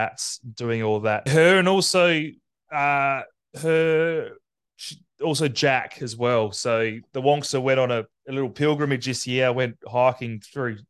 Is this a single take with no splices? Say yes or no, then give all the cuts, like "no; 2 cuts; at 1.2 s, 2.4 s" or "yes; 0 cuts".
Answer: no; 1 cut; at 1.3 s